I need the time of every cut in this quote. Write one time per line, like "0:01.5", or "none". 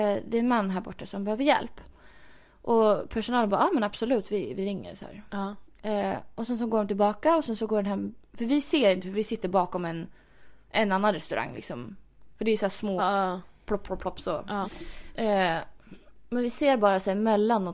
0:13.0
0:14.6